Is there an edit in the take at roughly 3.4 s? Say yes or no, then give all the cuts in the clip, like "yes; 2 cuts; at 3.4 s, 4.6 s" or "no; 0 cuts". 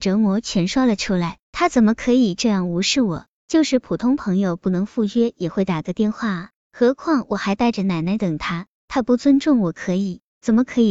no; 1 cut; at 1.4 s